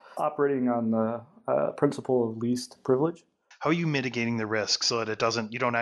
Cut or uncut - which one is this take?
cut